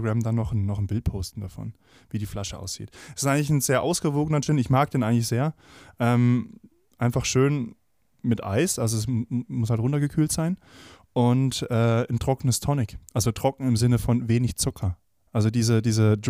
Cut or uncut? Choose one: uncut